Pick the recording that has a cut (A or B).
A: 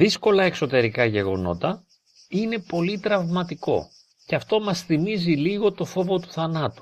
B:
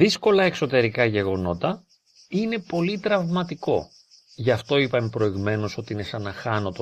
A